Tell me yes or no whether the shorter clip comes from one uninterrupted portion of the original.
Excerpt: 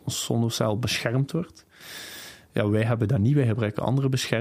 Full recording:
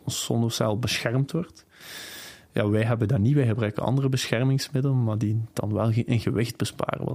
yes